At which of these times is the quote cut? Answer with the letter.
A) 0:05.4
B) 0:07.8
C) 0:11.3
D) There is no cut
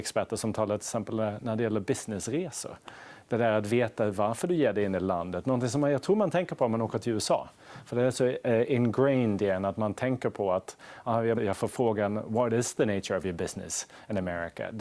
C